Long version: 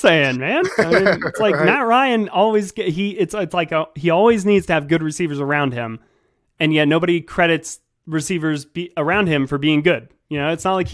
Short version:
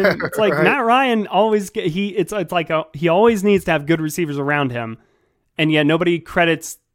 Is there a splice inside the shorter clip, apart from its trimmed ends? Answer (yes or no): no